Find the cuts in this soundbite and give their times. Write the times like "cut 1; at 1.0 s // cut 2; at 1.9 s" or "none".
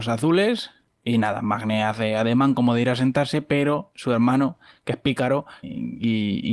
cut 1; at 5.6 s

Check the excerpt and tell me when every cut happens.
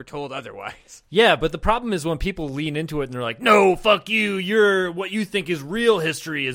none

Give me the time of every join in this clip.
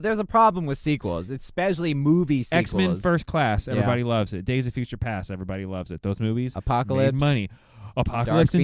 none

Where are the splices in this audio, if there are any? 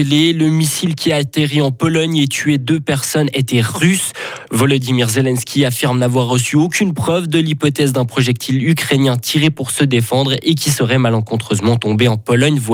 cut 1; at 4.5 s

